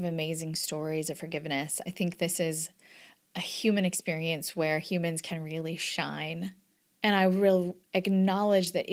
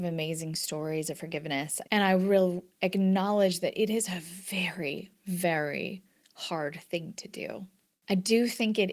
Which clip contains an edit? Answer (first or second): second